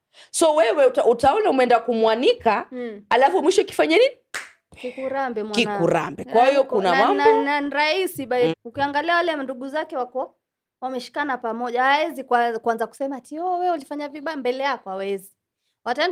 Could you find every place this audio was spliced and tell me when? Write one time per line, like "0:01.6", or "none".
0:04.7
0:08.5

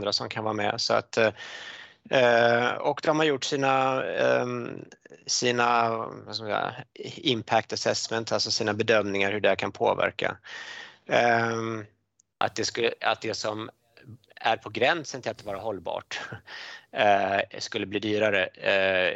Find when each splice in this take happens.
0:12.4

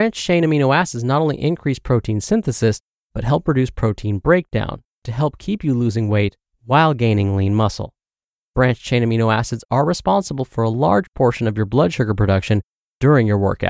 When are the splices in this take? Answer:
none

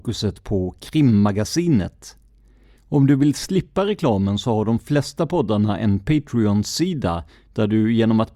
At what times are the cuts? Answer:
0:02.8

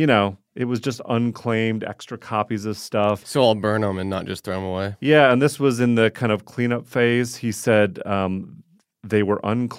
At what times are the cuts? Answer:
0:03.2

